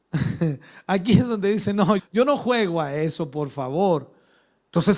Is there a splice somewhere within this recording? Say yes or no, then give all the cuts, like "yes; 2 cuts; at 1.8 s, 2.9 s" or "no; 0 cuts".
yes; 1 cut; at 2.0 s